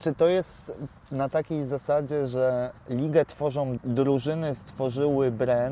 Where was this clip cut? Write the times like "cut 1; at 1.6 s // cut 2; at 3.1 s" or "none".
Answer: cut 1; at 3.8 s